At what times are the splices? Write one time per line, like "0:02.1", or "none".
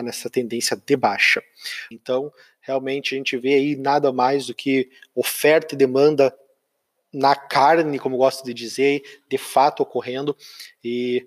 0:01.9